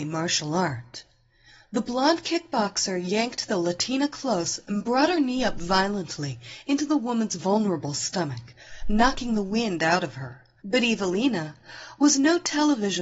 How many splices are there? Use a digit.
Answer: 1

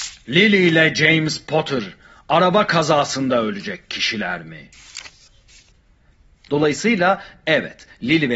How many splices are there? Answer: 1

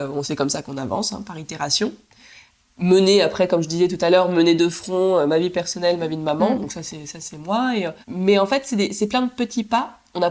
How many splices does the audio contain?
1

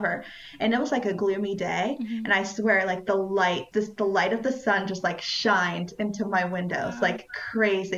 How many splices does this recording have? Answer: 1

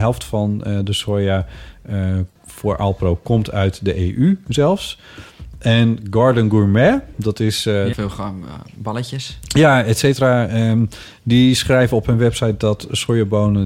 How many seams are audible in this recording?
2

